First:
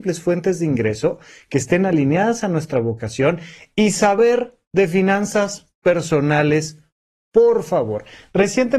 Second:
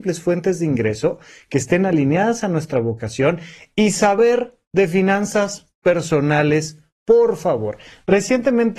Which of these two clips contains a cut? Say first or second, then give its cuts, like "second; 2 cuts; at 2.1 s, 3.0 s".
second; 1 cut; at 6.9 s